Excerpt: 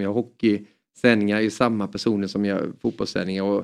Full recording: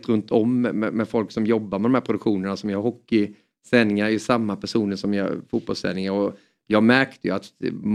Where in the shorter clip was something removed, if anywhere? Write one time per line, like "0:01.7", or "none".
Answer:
none